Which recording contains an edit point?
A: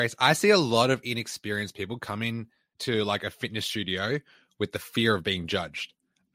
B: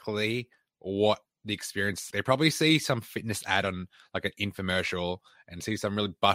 B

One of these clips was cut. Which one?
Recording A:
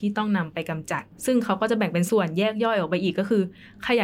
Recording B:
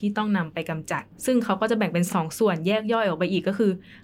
A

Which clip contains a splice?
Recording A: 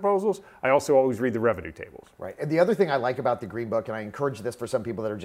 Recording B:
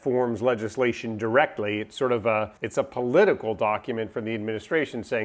B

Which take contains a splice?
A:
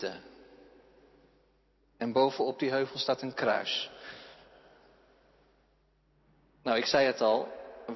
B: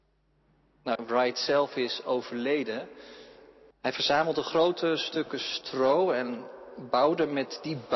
B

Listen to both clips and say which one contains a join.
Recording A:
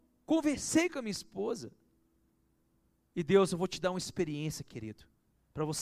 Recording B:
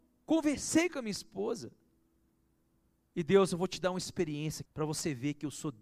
B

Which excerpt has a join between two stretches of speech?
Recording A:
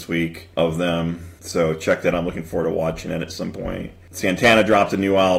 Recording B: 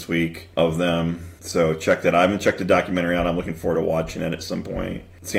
A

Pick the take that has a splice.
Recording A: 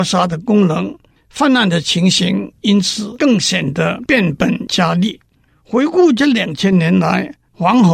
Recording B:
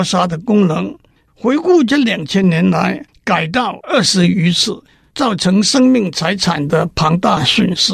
B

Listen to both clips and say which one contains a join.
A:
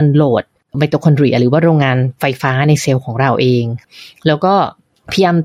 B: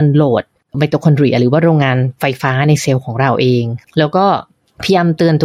B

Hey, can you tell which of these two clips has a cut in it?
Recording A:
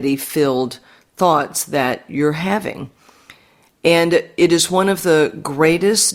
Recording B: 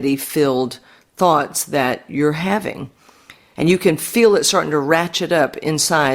B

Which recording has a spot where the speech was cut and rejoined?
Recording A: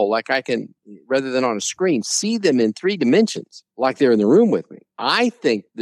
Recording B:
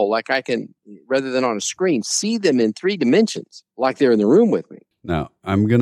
B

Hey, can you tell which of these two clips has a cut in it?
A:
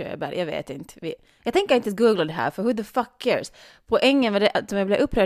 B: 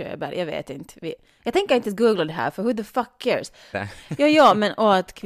B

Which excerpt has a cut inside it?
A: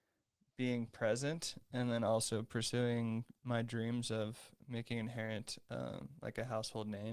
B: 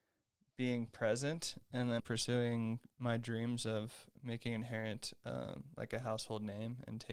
B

